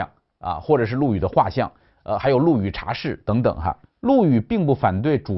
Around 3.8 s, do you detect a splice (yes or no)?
yes